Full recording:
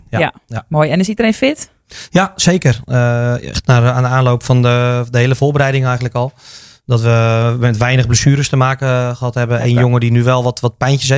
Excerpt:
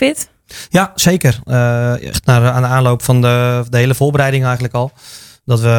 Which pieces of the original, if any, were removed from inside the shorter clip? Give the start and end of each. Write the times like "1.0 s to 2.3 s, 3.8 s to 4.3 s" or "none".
none